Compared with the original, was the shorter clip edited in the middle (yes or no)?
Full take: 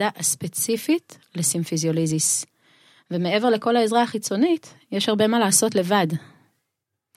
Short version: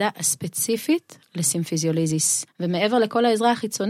yes